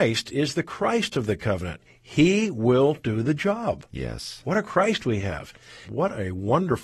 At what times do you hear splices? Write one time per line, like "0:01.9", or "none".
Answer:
0:05.8